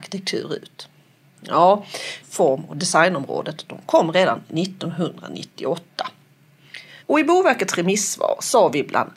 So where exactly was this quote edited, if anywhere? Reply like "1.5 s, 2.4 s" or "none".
2.2 s, 7.0 s